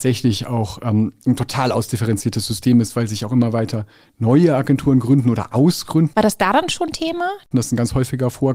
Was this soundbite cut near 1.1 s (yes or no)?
no